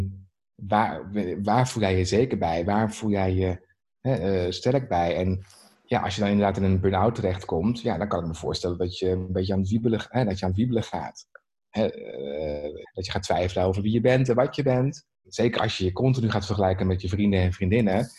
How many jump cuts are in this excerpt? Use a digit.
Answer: 2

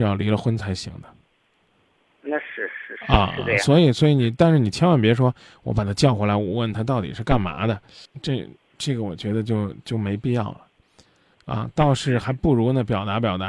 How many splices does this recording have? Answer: 0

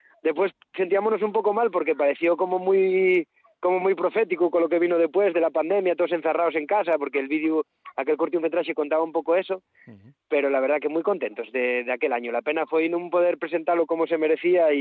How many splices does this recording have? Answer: 0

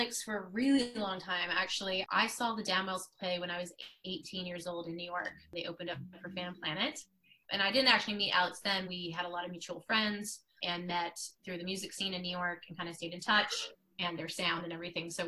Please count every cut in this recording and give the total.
2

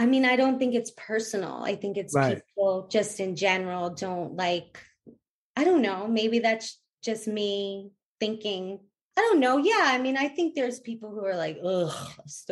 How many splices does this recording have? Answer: 0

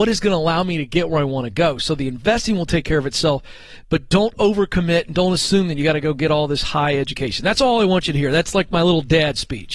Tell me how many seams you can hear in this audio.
0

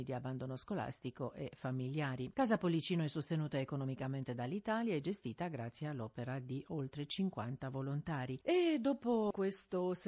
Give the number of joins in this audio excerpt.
2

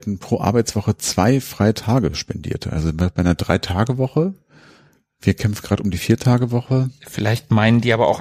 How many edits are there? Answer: 0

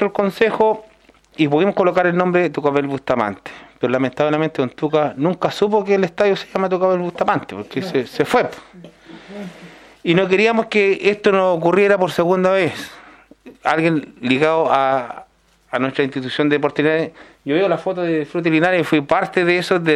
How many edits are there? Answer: 0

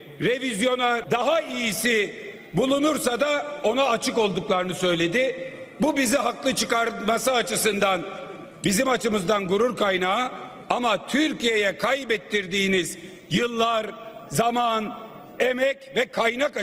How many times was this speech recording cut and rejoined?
1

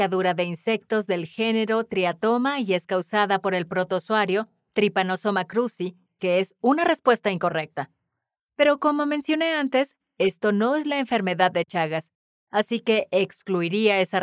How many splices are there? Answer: 2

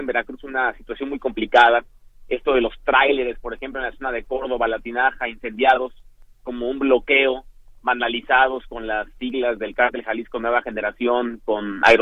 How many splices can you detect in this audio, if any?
0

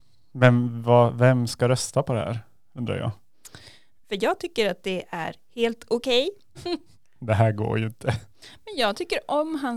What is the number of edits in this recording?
2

